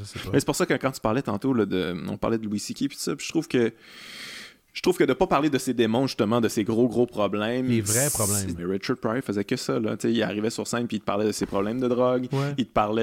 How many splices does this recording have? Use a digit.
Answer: 1